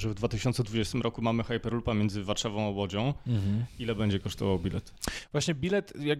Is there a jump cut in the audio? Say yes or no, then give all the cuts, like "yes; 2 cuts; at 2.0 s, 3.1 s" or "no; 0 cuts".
no; 0 cuts